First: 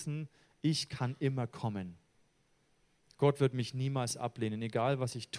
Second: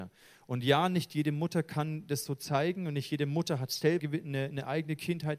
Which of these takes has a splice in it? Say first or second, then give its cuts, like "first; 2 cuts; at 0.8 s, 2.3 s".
second; 1 cut; at 4.0 s